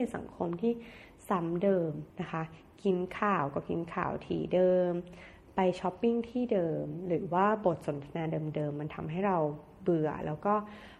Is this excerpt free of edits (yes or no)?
no